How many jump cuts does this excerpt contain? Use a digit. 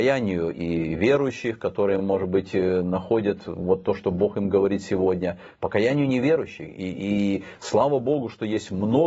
0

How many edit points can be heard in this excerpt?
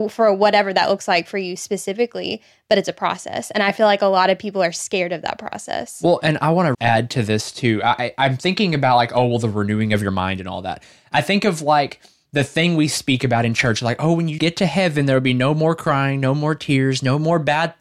2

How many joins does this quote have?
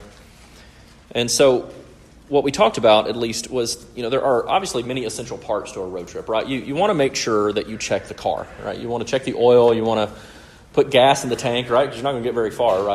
0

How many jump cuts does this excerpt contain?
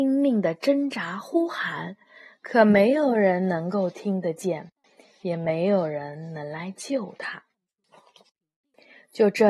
0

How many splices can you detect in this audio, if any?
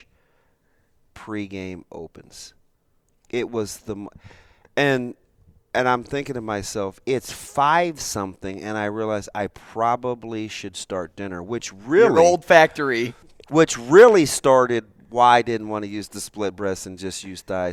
0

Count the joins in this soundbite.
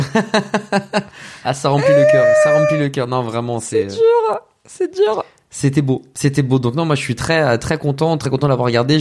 0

